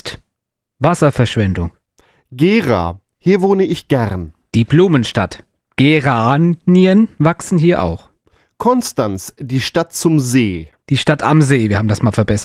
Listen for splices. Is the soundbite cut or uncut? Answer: uncut